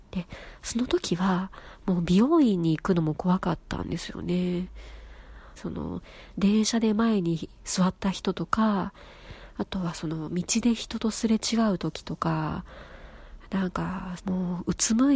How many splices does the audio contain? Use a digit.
2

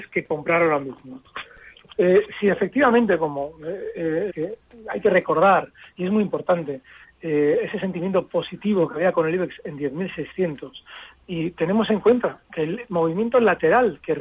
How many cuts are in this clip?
1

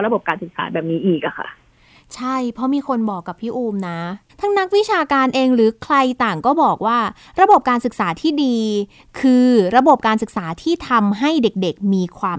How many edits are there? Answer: 0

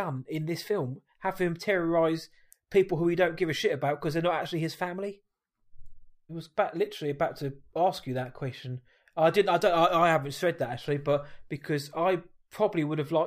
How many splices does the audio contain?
1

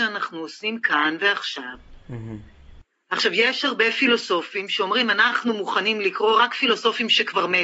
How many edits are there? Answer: 0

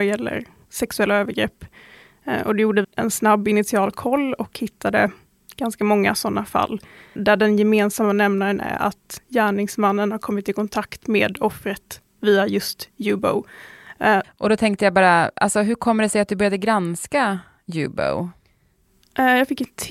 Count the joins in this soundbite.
2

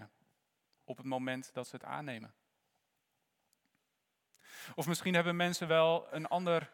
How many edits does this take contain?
0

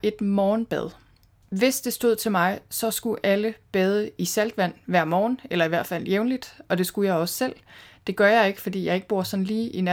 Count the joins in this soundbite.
0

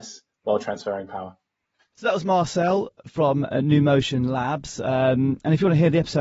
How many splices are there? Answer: 0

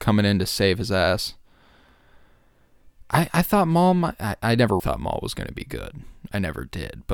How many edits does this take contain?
1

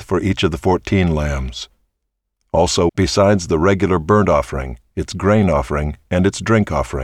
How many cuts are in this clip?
1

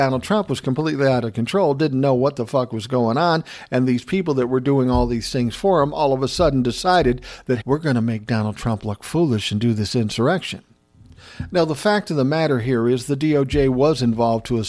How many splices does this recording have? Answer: 1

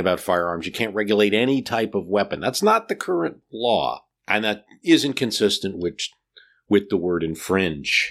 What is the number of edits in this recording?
0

